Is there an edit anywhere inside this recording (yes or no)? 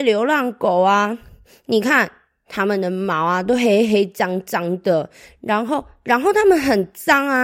no